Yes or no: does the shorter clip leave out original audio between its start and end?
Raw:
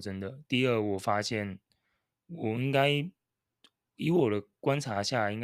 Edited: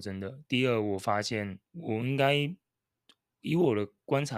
yes